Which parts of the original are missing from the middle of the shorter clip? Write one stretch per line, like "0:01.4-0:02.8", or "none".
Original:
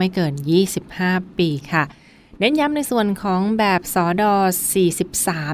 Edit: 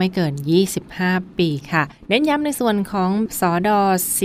0:02.0-0:02.3
0:03.6-0:03.8